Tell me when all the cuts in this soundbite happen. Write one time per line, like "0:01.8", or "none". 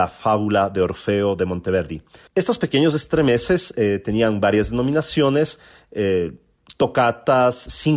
0:02.3